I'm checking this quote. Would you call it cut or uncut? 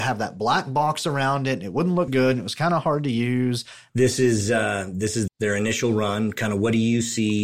cut